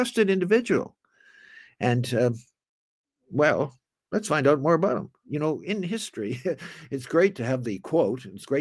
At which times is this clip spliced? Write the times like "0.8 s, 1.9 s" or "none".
none